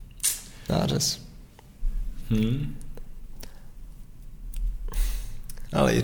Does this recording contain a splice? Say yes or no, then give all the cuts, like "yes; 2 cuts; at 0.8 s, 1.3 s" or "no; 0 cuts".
no; 0 cuts